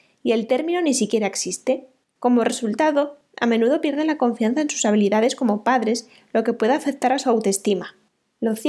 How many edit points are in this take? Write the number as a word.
one